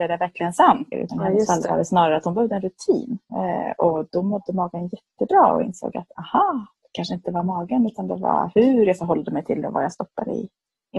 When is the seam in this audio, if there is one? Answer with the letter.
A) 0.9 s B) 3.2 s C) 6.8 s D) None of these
A